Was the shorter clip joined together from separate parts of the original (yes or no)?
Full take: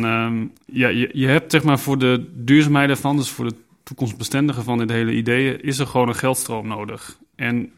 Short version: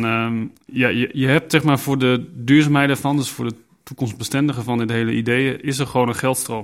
no